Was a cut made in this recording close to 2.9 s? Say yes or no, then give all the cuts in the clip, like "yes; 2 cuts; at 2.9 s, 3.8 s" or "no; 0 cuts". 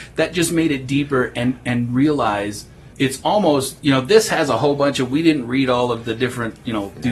yes; 1 cut; at 2.9 s